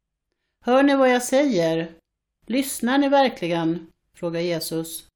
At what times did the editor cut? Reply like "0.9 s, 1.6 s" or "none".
none